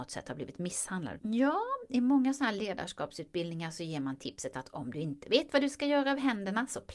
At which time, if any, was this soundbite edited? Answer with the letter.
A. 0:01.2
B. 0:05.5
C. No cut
A